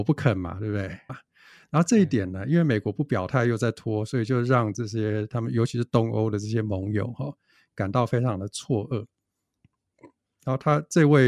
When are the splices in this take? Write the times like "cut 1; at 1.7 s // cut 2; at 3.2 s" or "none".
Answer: cut 1; at 1.1 s